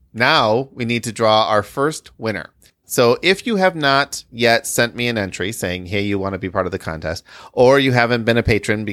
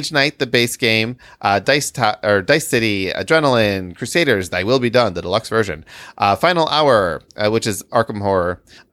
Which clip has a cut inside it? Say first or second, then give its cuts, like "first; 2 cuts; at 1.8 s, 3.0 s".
first; 1 cut; at 2.8 s